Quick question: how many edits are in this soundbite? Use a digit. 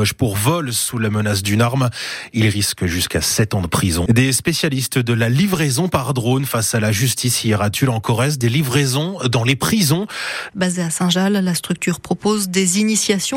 2